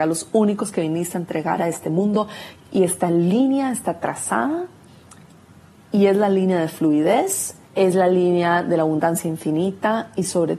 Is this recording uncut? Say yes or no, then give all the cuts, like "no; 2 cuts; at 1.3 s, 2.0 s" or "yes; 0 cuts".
no; 2 cuts; at 2.6 s, 7.6 s